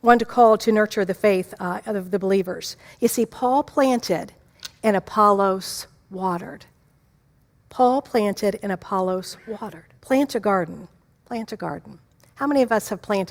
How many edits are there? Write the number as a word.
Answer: one